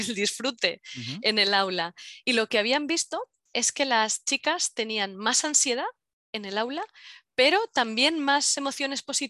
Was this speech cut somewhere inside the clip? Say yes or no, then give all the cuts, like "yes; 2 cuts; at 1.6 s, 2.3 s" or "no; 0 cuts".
no; 0 cuts